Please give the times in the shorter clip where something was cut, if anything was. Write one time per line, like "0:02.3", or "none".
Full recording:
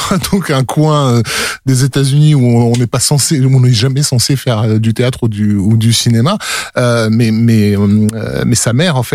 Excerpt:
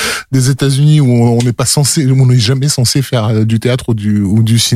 none